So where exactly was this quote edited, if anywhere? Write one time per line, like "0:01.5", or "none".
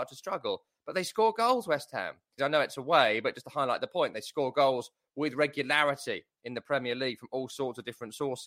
0:02.4